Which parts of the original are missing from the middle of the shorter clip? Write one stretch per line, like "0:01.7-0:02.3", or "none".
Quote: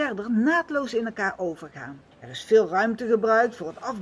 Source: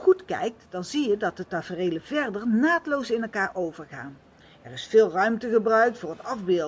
0:04.3-0:04.5